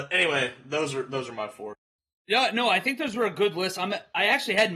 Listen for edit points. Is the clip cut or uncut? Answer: uncut